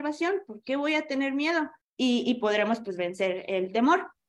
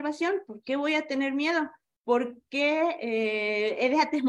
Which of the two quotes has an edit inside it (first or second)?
first